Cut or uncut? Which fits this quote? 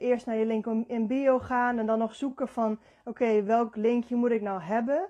uncut